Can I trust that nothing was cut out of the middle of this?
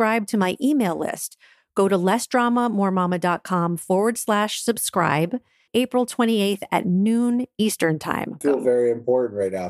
no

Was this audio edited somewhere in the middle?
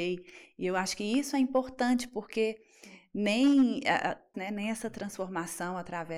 yes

